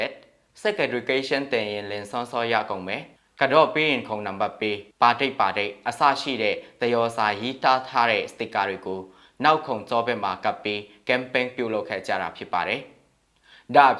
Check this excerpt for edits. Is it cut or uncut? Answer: cut